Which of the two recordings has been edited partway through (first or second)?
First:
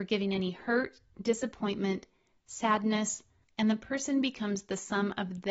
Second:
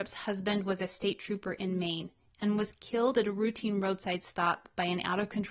first